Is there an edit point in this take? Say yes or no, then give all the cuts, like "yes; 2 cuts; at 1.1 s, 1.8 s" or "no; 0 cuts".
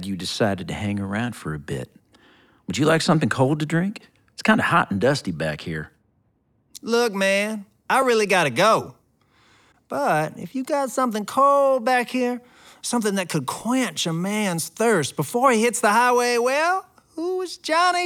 no; 0 cuts